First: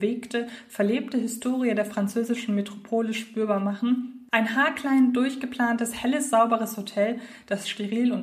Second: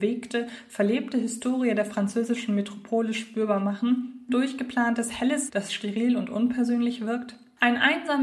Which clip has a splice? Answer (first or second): second